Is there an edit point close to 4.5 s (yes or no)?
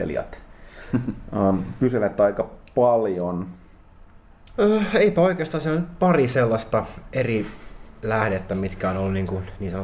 yes